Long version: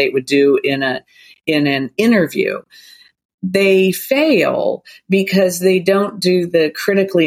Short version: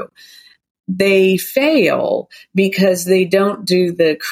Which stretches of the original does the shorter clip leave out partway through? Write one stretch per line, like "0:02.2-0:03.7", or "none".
none